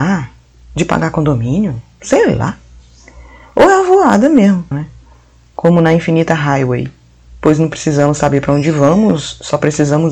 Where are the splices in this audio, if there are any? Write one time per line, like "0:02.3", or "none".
0:04.7